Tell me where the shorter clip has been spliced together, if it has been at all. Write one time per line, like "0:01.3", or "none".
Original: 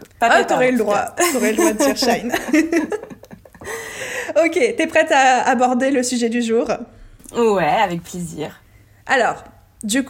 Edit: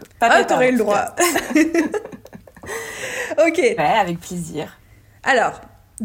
0:01.3
0:03.8